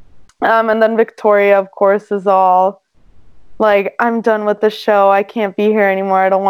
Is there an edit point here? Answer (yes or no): no